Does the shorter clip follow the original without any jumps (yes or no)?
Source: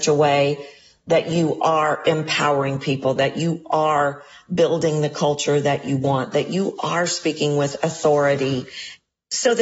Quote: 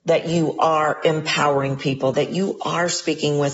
no